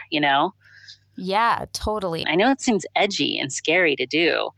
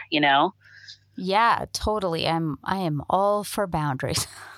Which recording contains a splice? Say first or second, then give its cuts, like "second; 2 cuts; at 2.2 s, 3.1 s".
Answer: first; 1 cut; at 2.2 s